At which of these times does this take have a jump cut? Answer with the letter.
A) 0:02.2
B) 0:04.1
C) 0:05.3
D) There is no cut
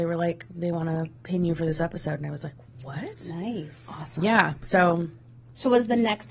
D